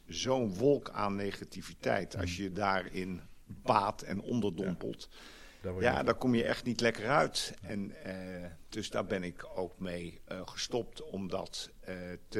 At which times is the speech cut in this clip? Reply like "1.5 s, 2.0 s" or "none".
none

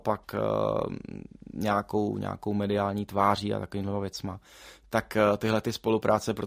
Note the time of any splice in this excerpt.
none

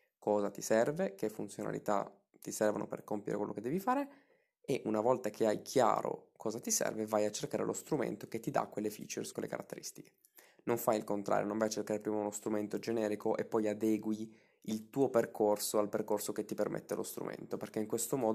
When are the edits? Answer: 9.3 s

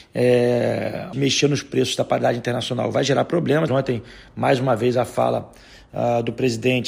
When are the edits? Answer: 1.1 s, 3.7 s

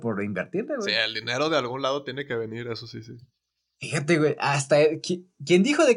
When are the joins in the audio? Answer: none

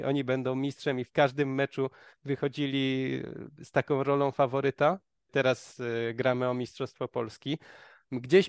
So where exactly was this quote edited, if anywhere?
5.3 s

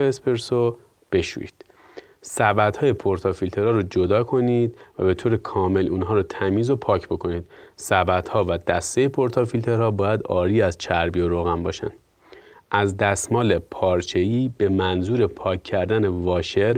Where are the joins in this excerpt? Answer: none

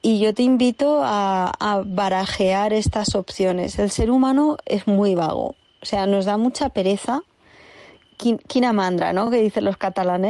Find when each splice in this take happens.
none

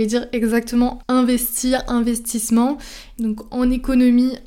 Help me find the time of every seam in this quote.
3.2 s

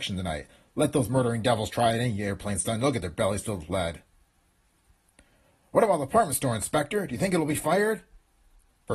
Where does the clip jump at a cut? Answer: none

